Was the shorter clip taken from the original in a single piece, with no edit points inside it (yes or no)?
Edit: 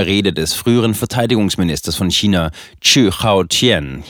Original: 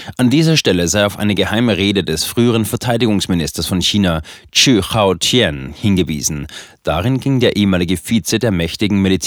yes